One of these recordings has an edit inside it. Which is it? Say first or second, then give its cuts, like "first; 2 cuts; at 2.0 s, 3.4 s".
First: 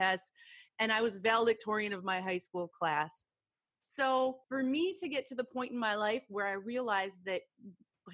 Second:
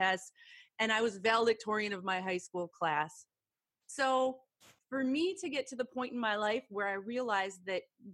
first; 1 cut; at 4.4 s